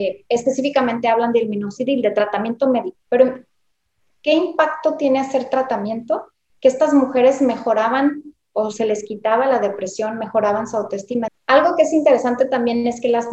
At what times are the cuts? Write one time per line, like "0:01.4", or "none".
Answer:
0:03.0
0:11.3